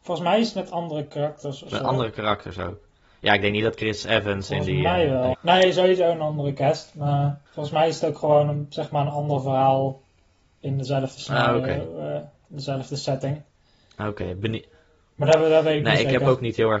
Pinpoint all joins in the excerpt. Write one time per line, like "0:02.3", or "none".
0:05.3
0:07.5